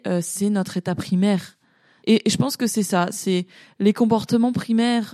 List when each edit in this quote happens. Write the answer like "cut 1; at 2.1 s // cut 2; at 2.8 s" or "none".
cut 1; at 2.0 s